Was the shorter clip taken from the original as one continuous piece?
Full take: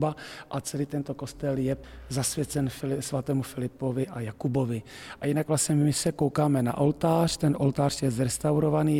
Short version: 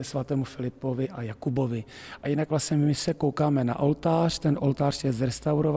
yes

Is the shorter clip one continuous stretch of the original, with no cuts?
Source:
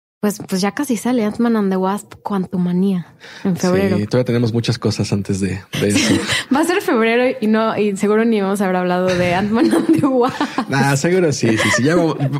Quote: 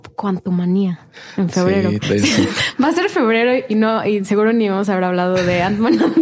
no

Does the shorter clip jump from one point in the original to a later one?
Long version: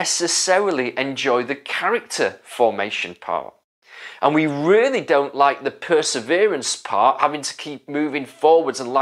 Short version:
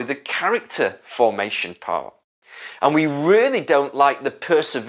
no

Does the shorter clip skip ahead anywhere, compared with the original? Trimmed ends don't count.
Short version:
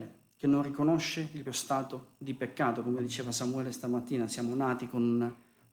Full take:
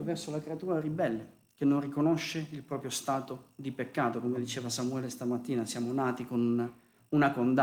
yes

